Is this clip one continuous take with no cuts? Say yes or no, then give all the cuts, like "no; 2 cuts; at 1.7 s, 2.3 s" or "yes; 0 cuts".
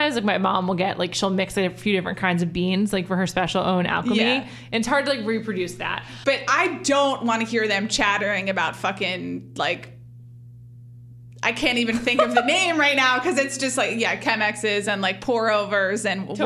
no; 1 cut; at 6.2 s